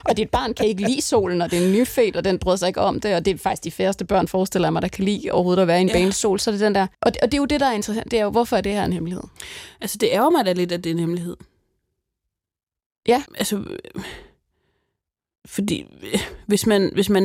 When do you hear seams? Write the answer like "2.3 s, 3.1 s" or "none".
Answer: 6.9 s, 13.3 s